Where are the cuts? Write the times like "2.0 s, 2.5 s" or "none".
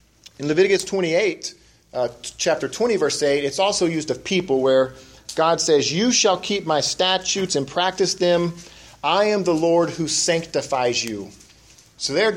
none